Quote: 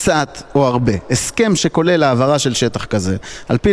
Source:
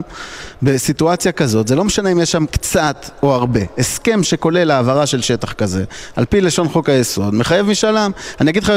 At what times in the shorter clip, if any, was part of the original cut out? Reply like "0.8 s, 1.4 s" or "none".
none